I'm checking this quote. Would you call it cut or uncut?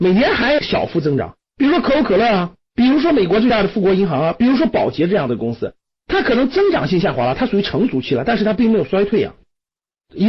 uncut